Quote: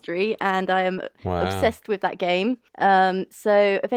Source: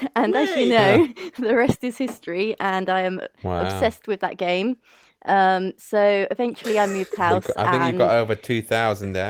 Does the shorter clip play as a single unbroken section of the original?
no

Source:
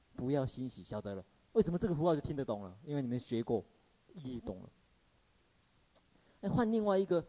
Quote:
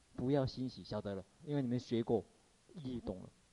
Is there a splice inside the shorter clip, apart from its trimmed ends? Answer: yes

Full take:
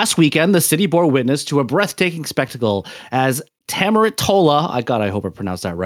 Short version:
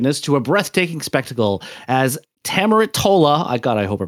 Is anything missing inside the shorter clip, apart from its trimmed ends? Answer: no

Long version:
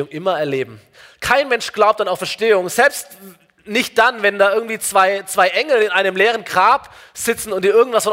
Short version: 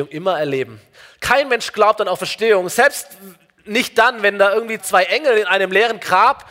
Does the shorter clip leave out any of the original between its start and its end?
yes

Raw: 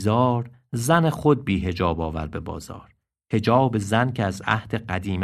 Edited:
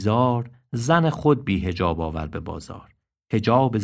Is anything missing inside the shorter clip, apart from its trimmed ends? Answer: no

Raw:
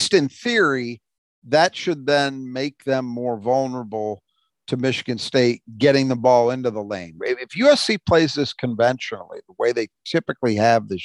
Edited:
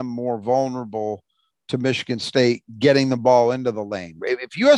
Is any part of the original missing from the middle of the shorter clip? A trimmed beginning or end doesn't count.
no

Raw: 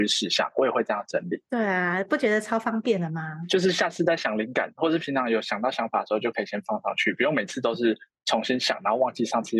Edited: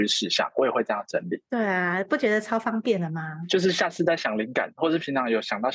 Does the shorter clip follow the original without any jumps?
yes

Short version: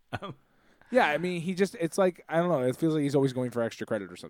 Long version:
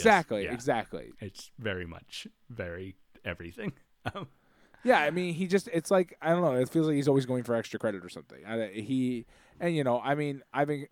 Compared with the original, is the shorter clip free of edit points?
yes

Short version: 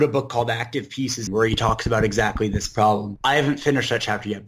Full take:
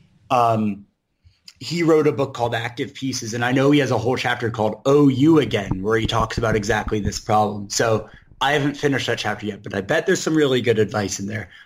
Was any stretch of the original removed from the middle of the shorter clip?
yes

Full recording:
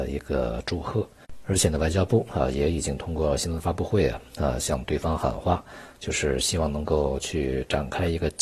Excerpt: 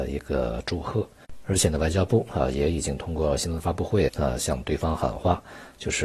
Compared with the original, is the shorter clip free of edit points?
no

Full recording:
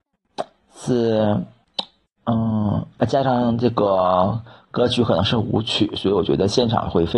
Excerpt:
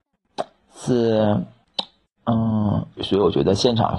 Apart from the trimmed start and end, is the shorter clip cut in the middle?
yes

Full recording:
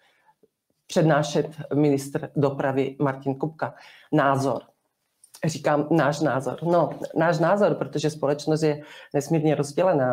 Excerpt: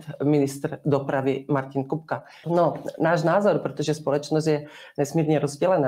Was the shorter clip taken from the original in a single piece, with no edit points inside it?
no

